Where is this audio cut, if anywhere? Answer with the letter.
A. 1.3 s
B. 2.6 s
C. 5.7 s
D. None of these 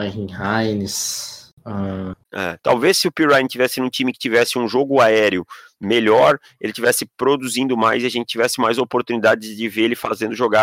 B